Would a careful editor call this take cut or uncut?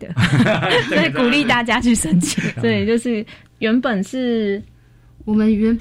cut